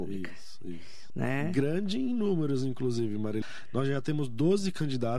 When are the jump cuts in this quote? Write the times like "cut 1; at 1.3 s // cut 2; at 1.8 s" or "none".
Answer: cut 1; at 1.1 s // cut 2; at 3.4 s

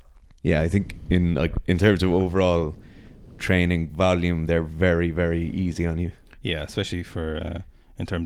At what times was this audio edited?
none

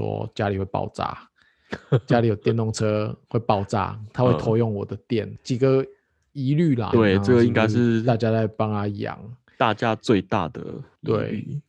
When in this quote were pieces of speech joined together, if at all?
cut 1; at 6.9 s

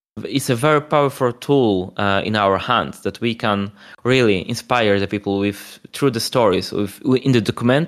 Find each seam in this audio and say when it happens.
none

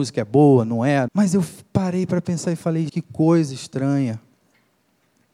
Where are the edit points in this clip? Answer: cut 1; at 1.1 s // cut 2; at 2.9 s

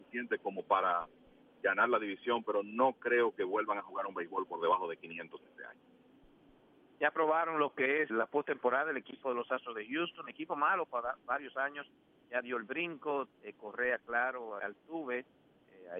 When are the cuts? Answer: cut 1; at 8.1 s // cut 2; at 13.3 s // cut 3; at 14.6 s

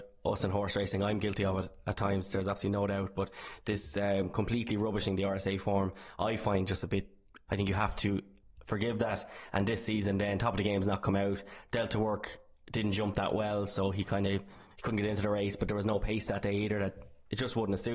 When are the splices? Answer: cut 1; at 7.5 s

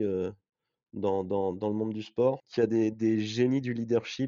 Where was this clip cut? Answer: cut 1; at 2.4 s

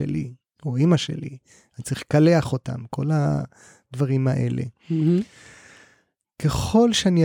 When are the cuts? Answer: none

